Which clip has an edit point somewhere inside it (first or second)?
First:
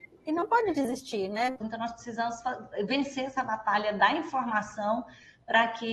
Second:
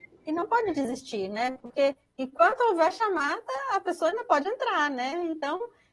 first